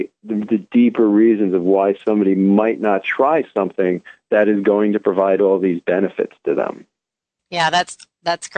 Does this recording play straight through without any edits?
yes; 0 cuts

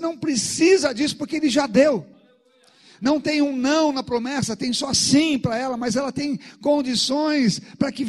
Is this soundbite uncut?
yes; 0 cuts

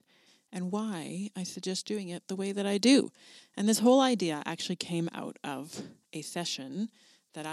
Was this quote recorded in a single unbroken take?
yes; 0 cuts

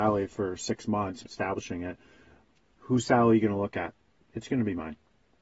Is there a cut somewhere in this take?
yes; 2 cuts; at 1.2 s, 4.1 s

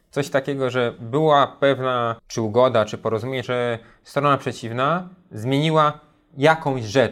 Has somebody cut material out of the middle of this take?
yes; 2 cuts; at 2.2 s, 3.4 s

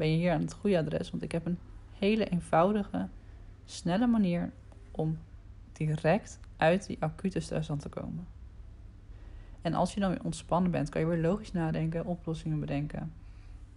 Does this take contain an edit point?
no; 0 cuts

